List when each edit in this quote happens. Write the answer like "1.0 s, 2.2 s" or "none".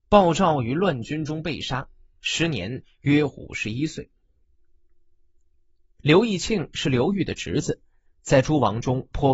none